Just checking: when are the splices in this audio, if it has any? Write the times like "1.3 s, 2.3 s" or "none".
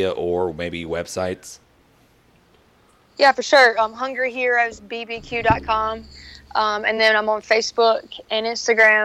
none